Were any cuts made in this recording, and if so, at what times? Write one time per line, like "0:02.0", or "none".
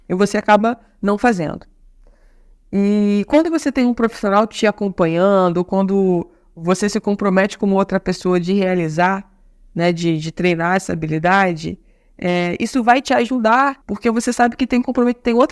0:13.8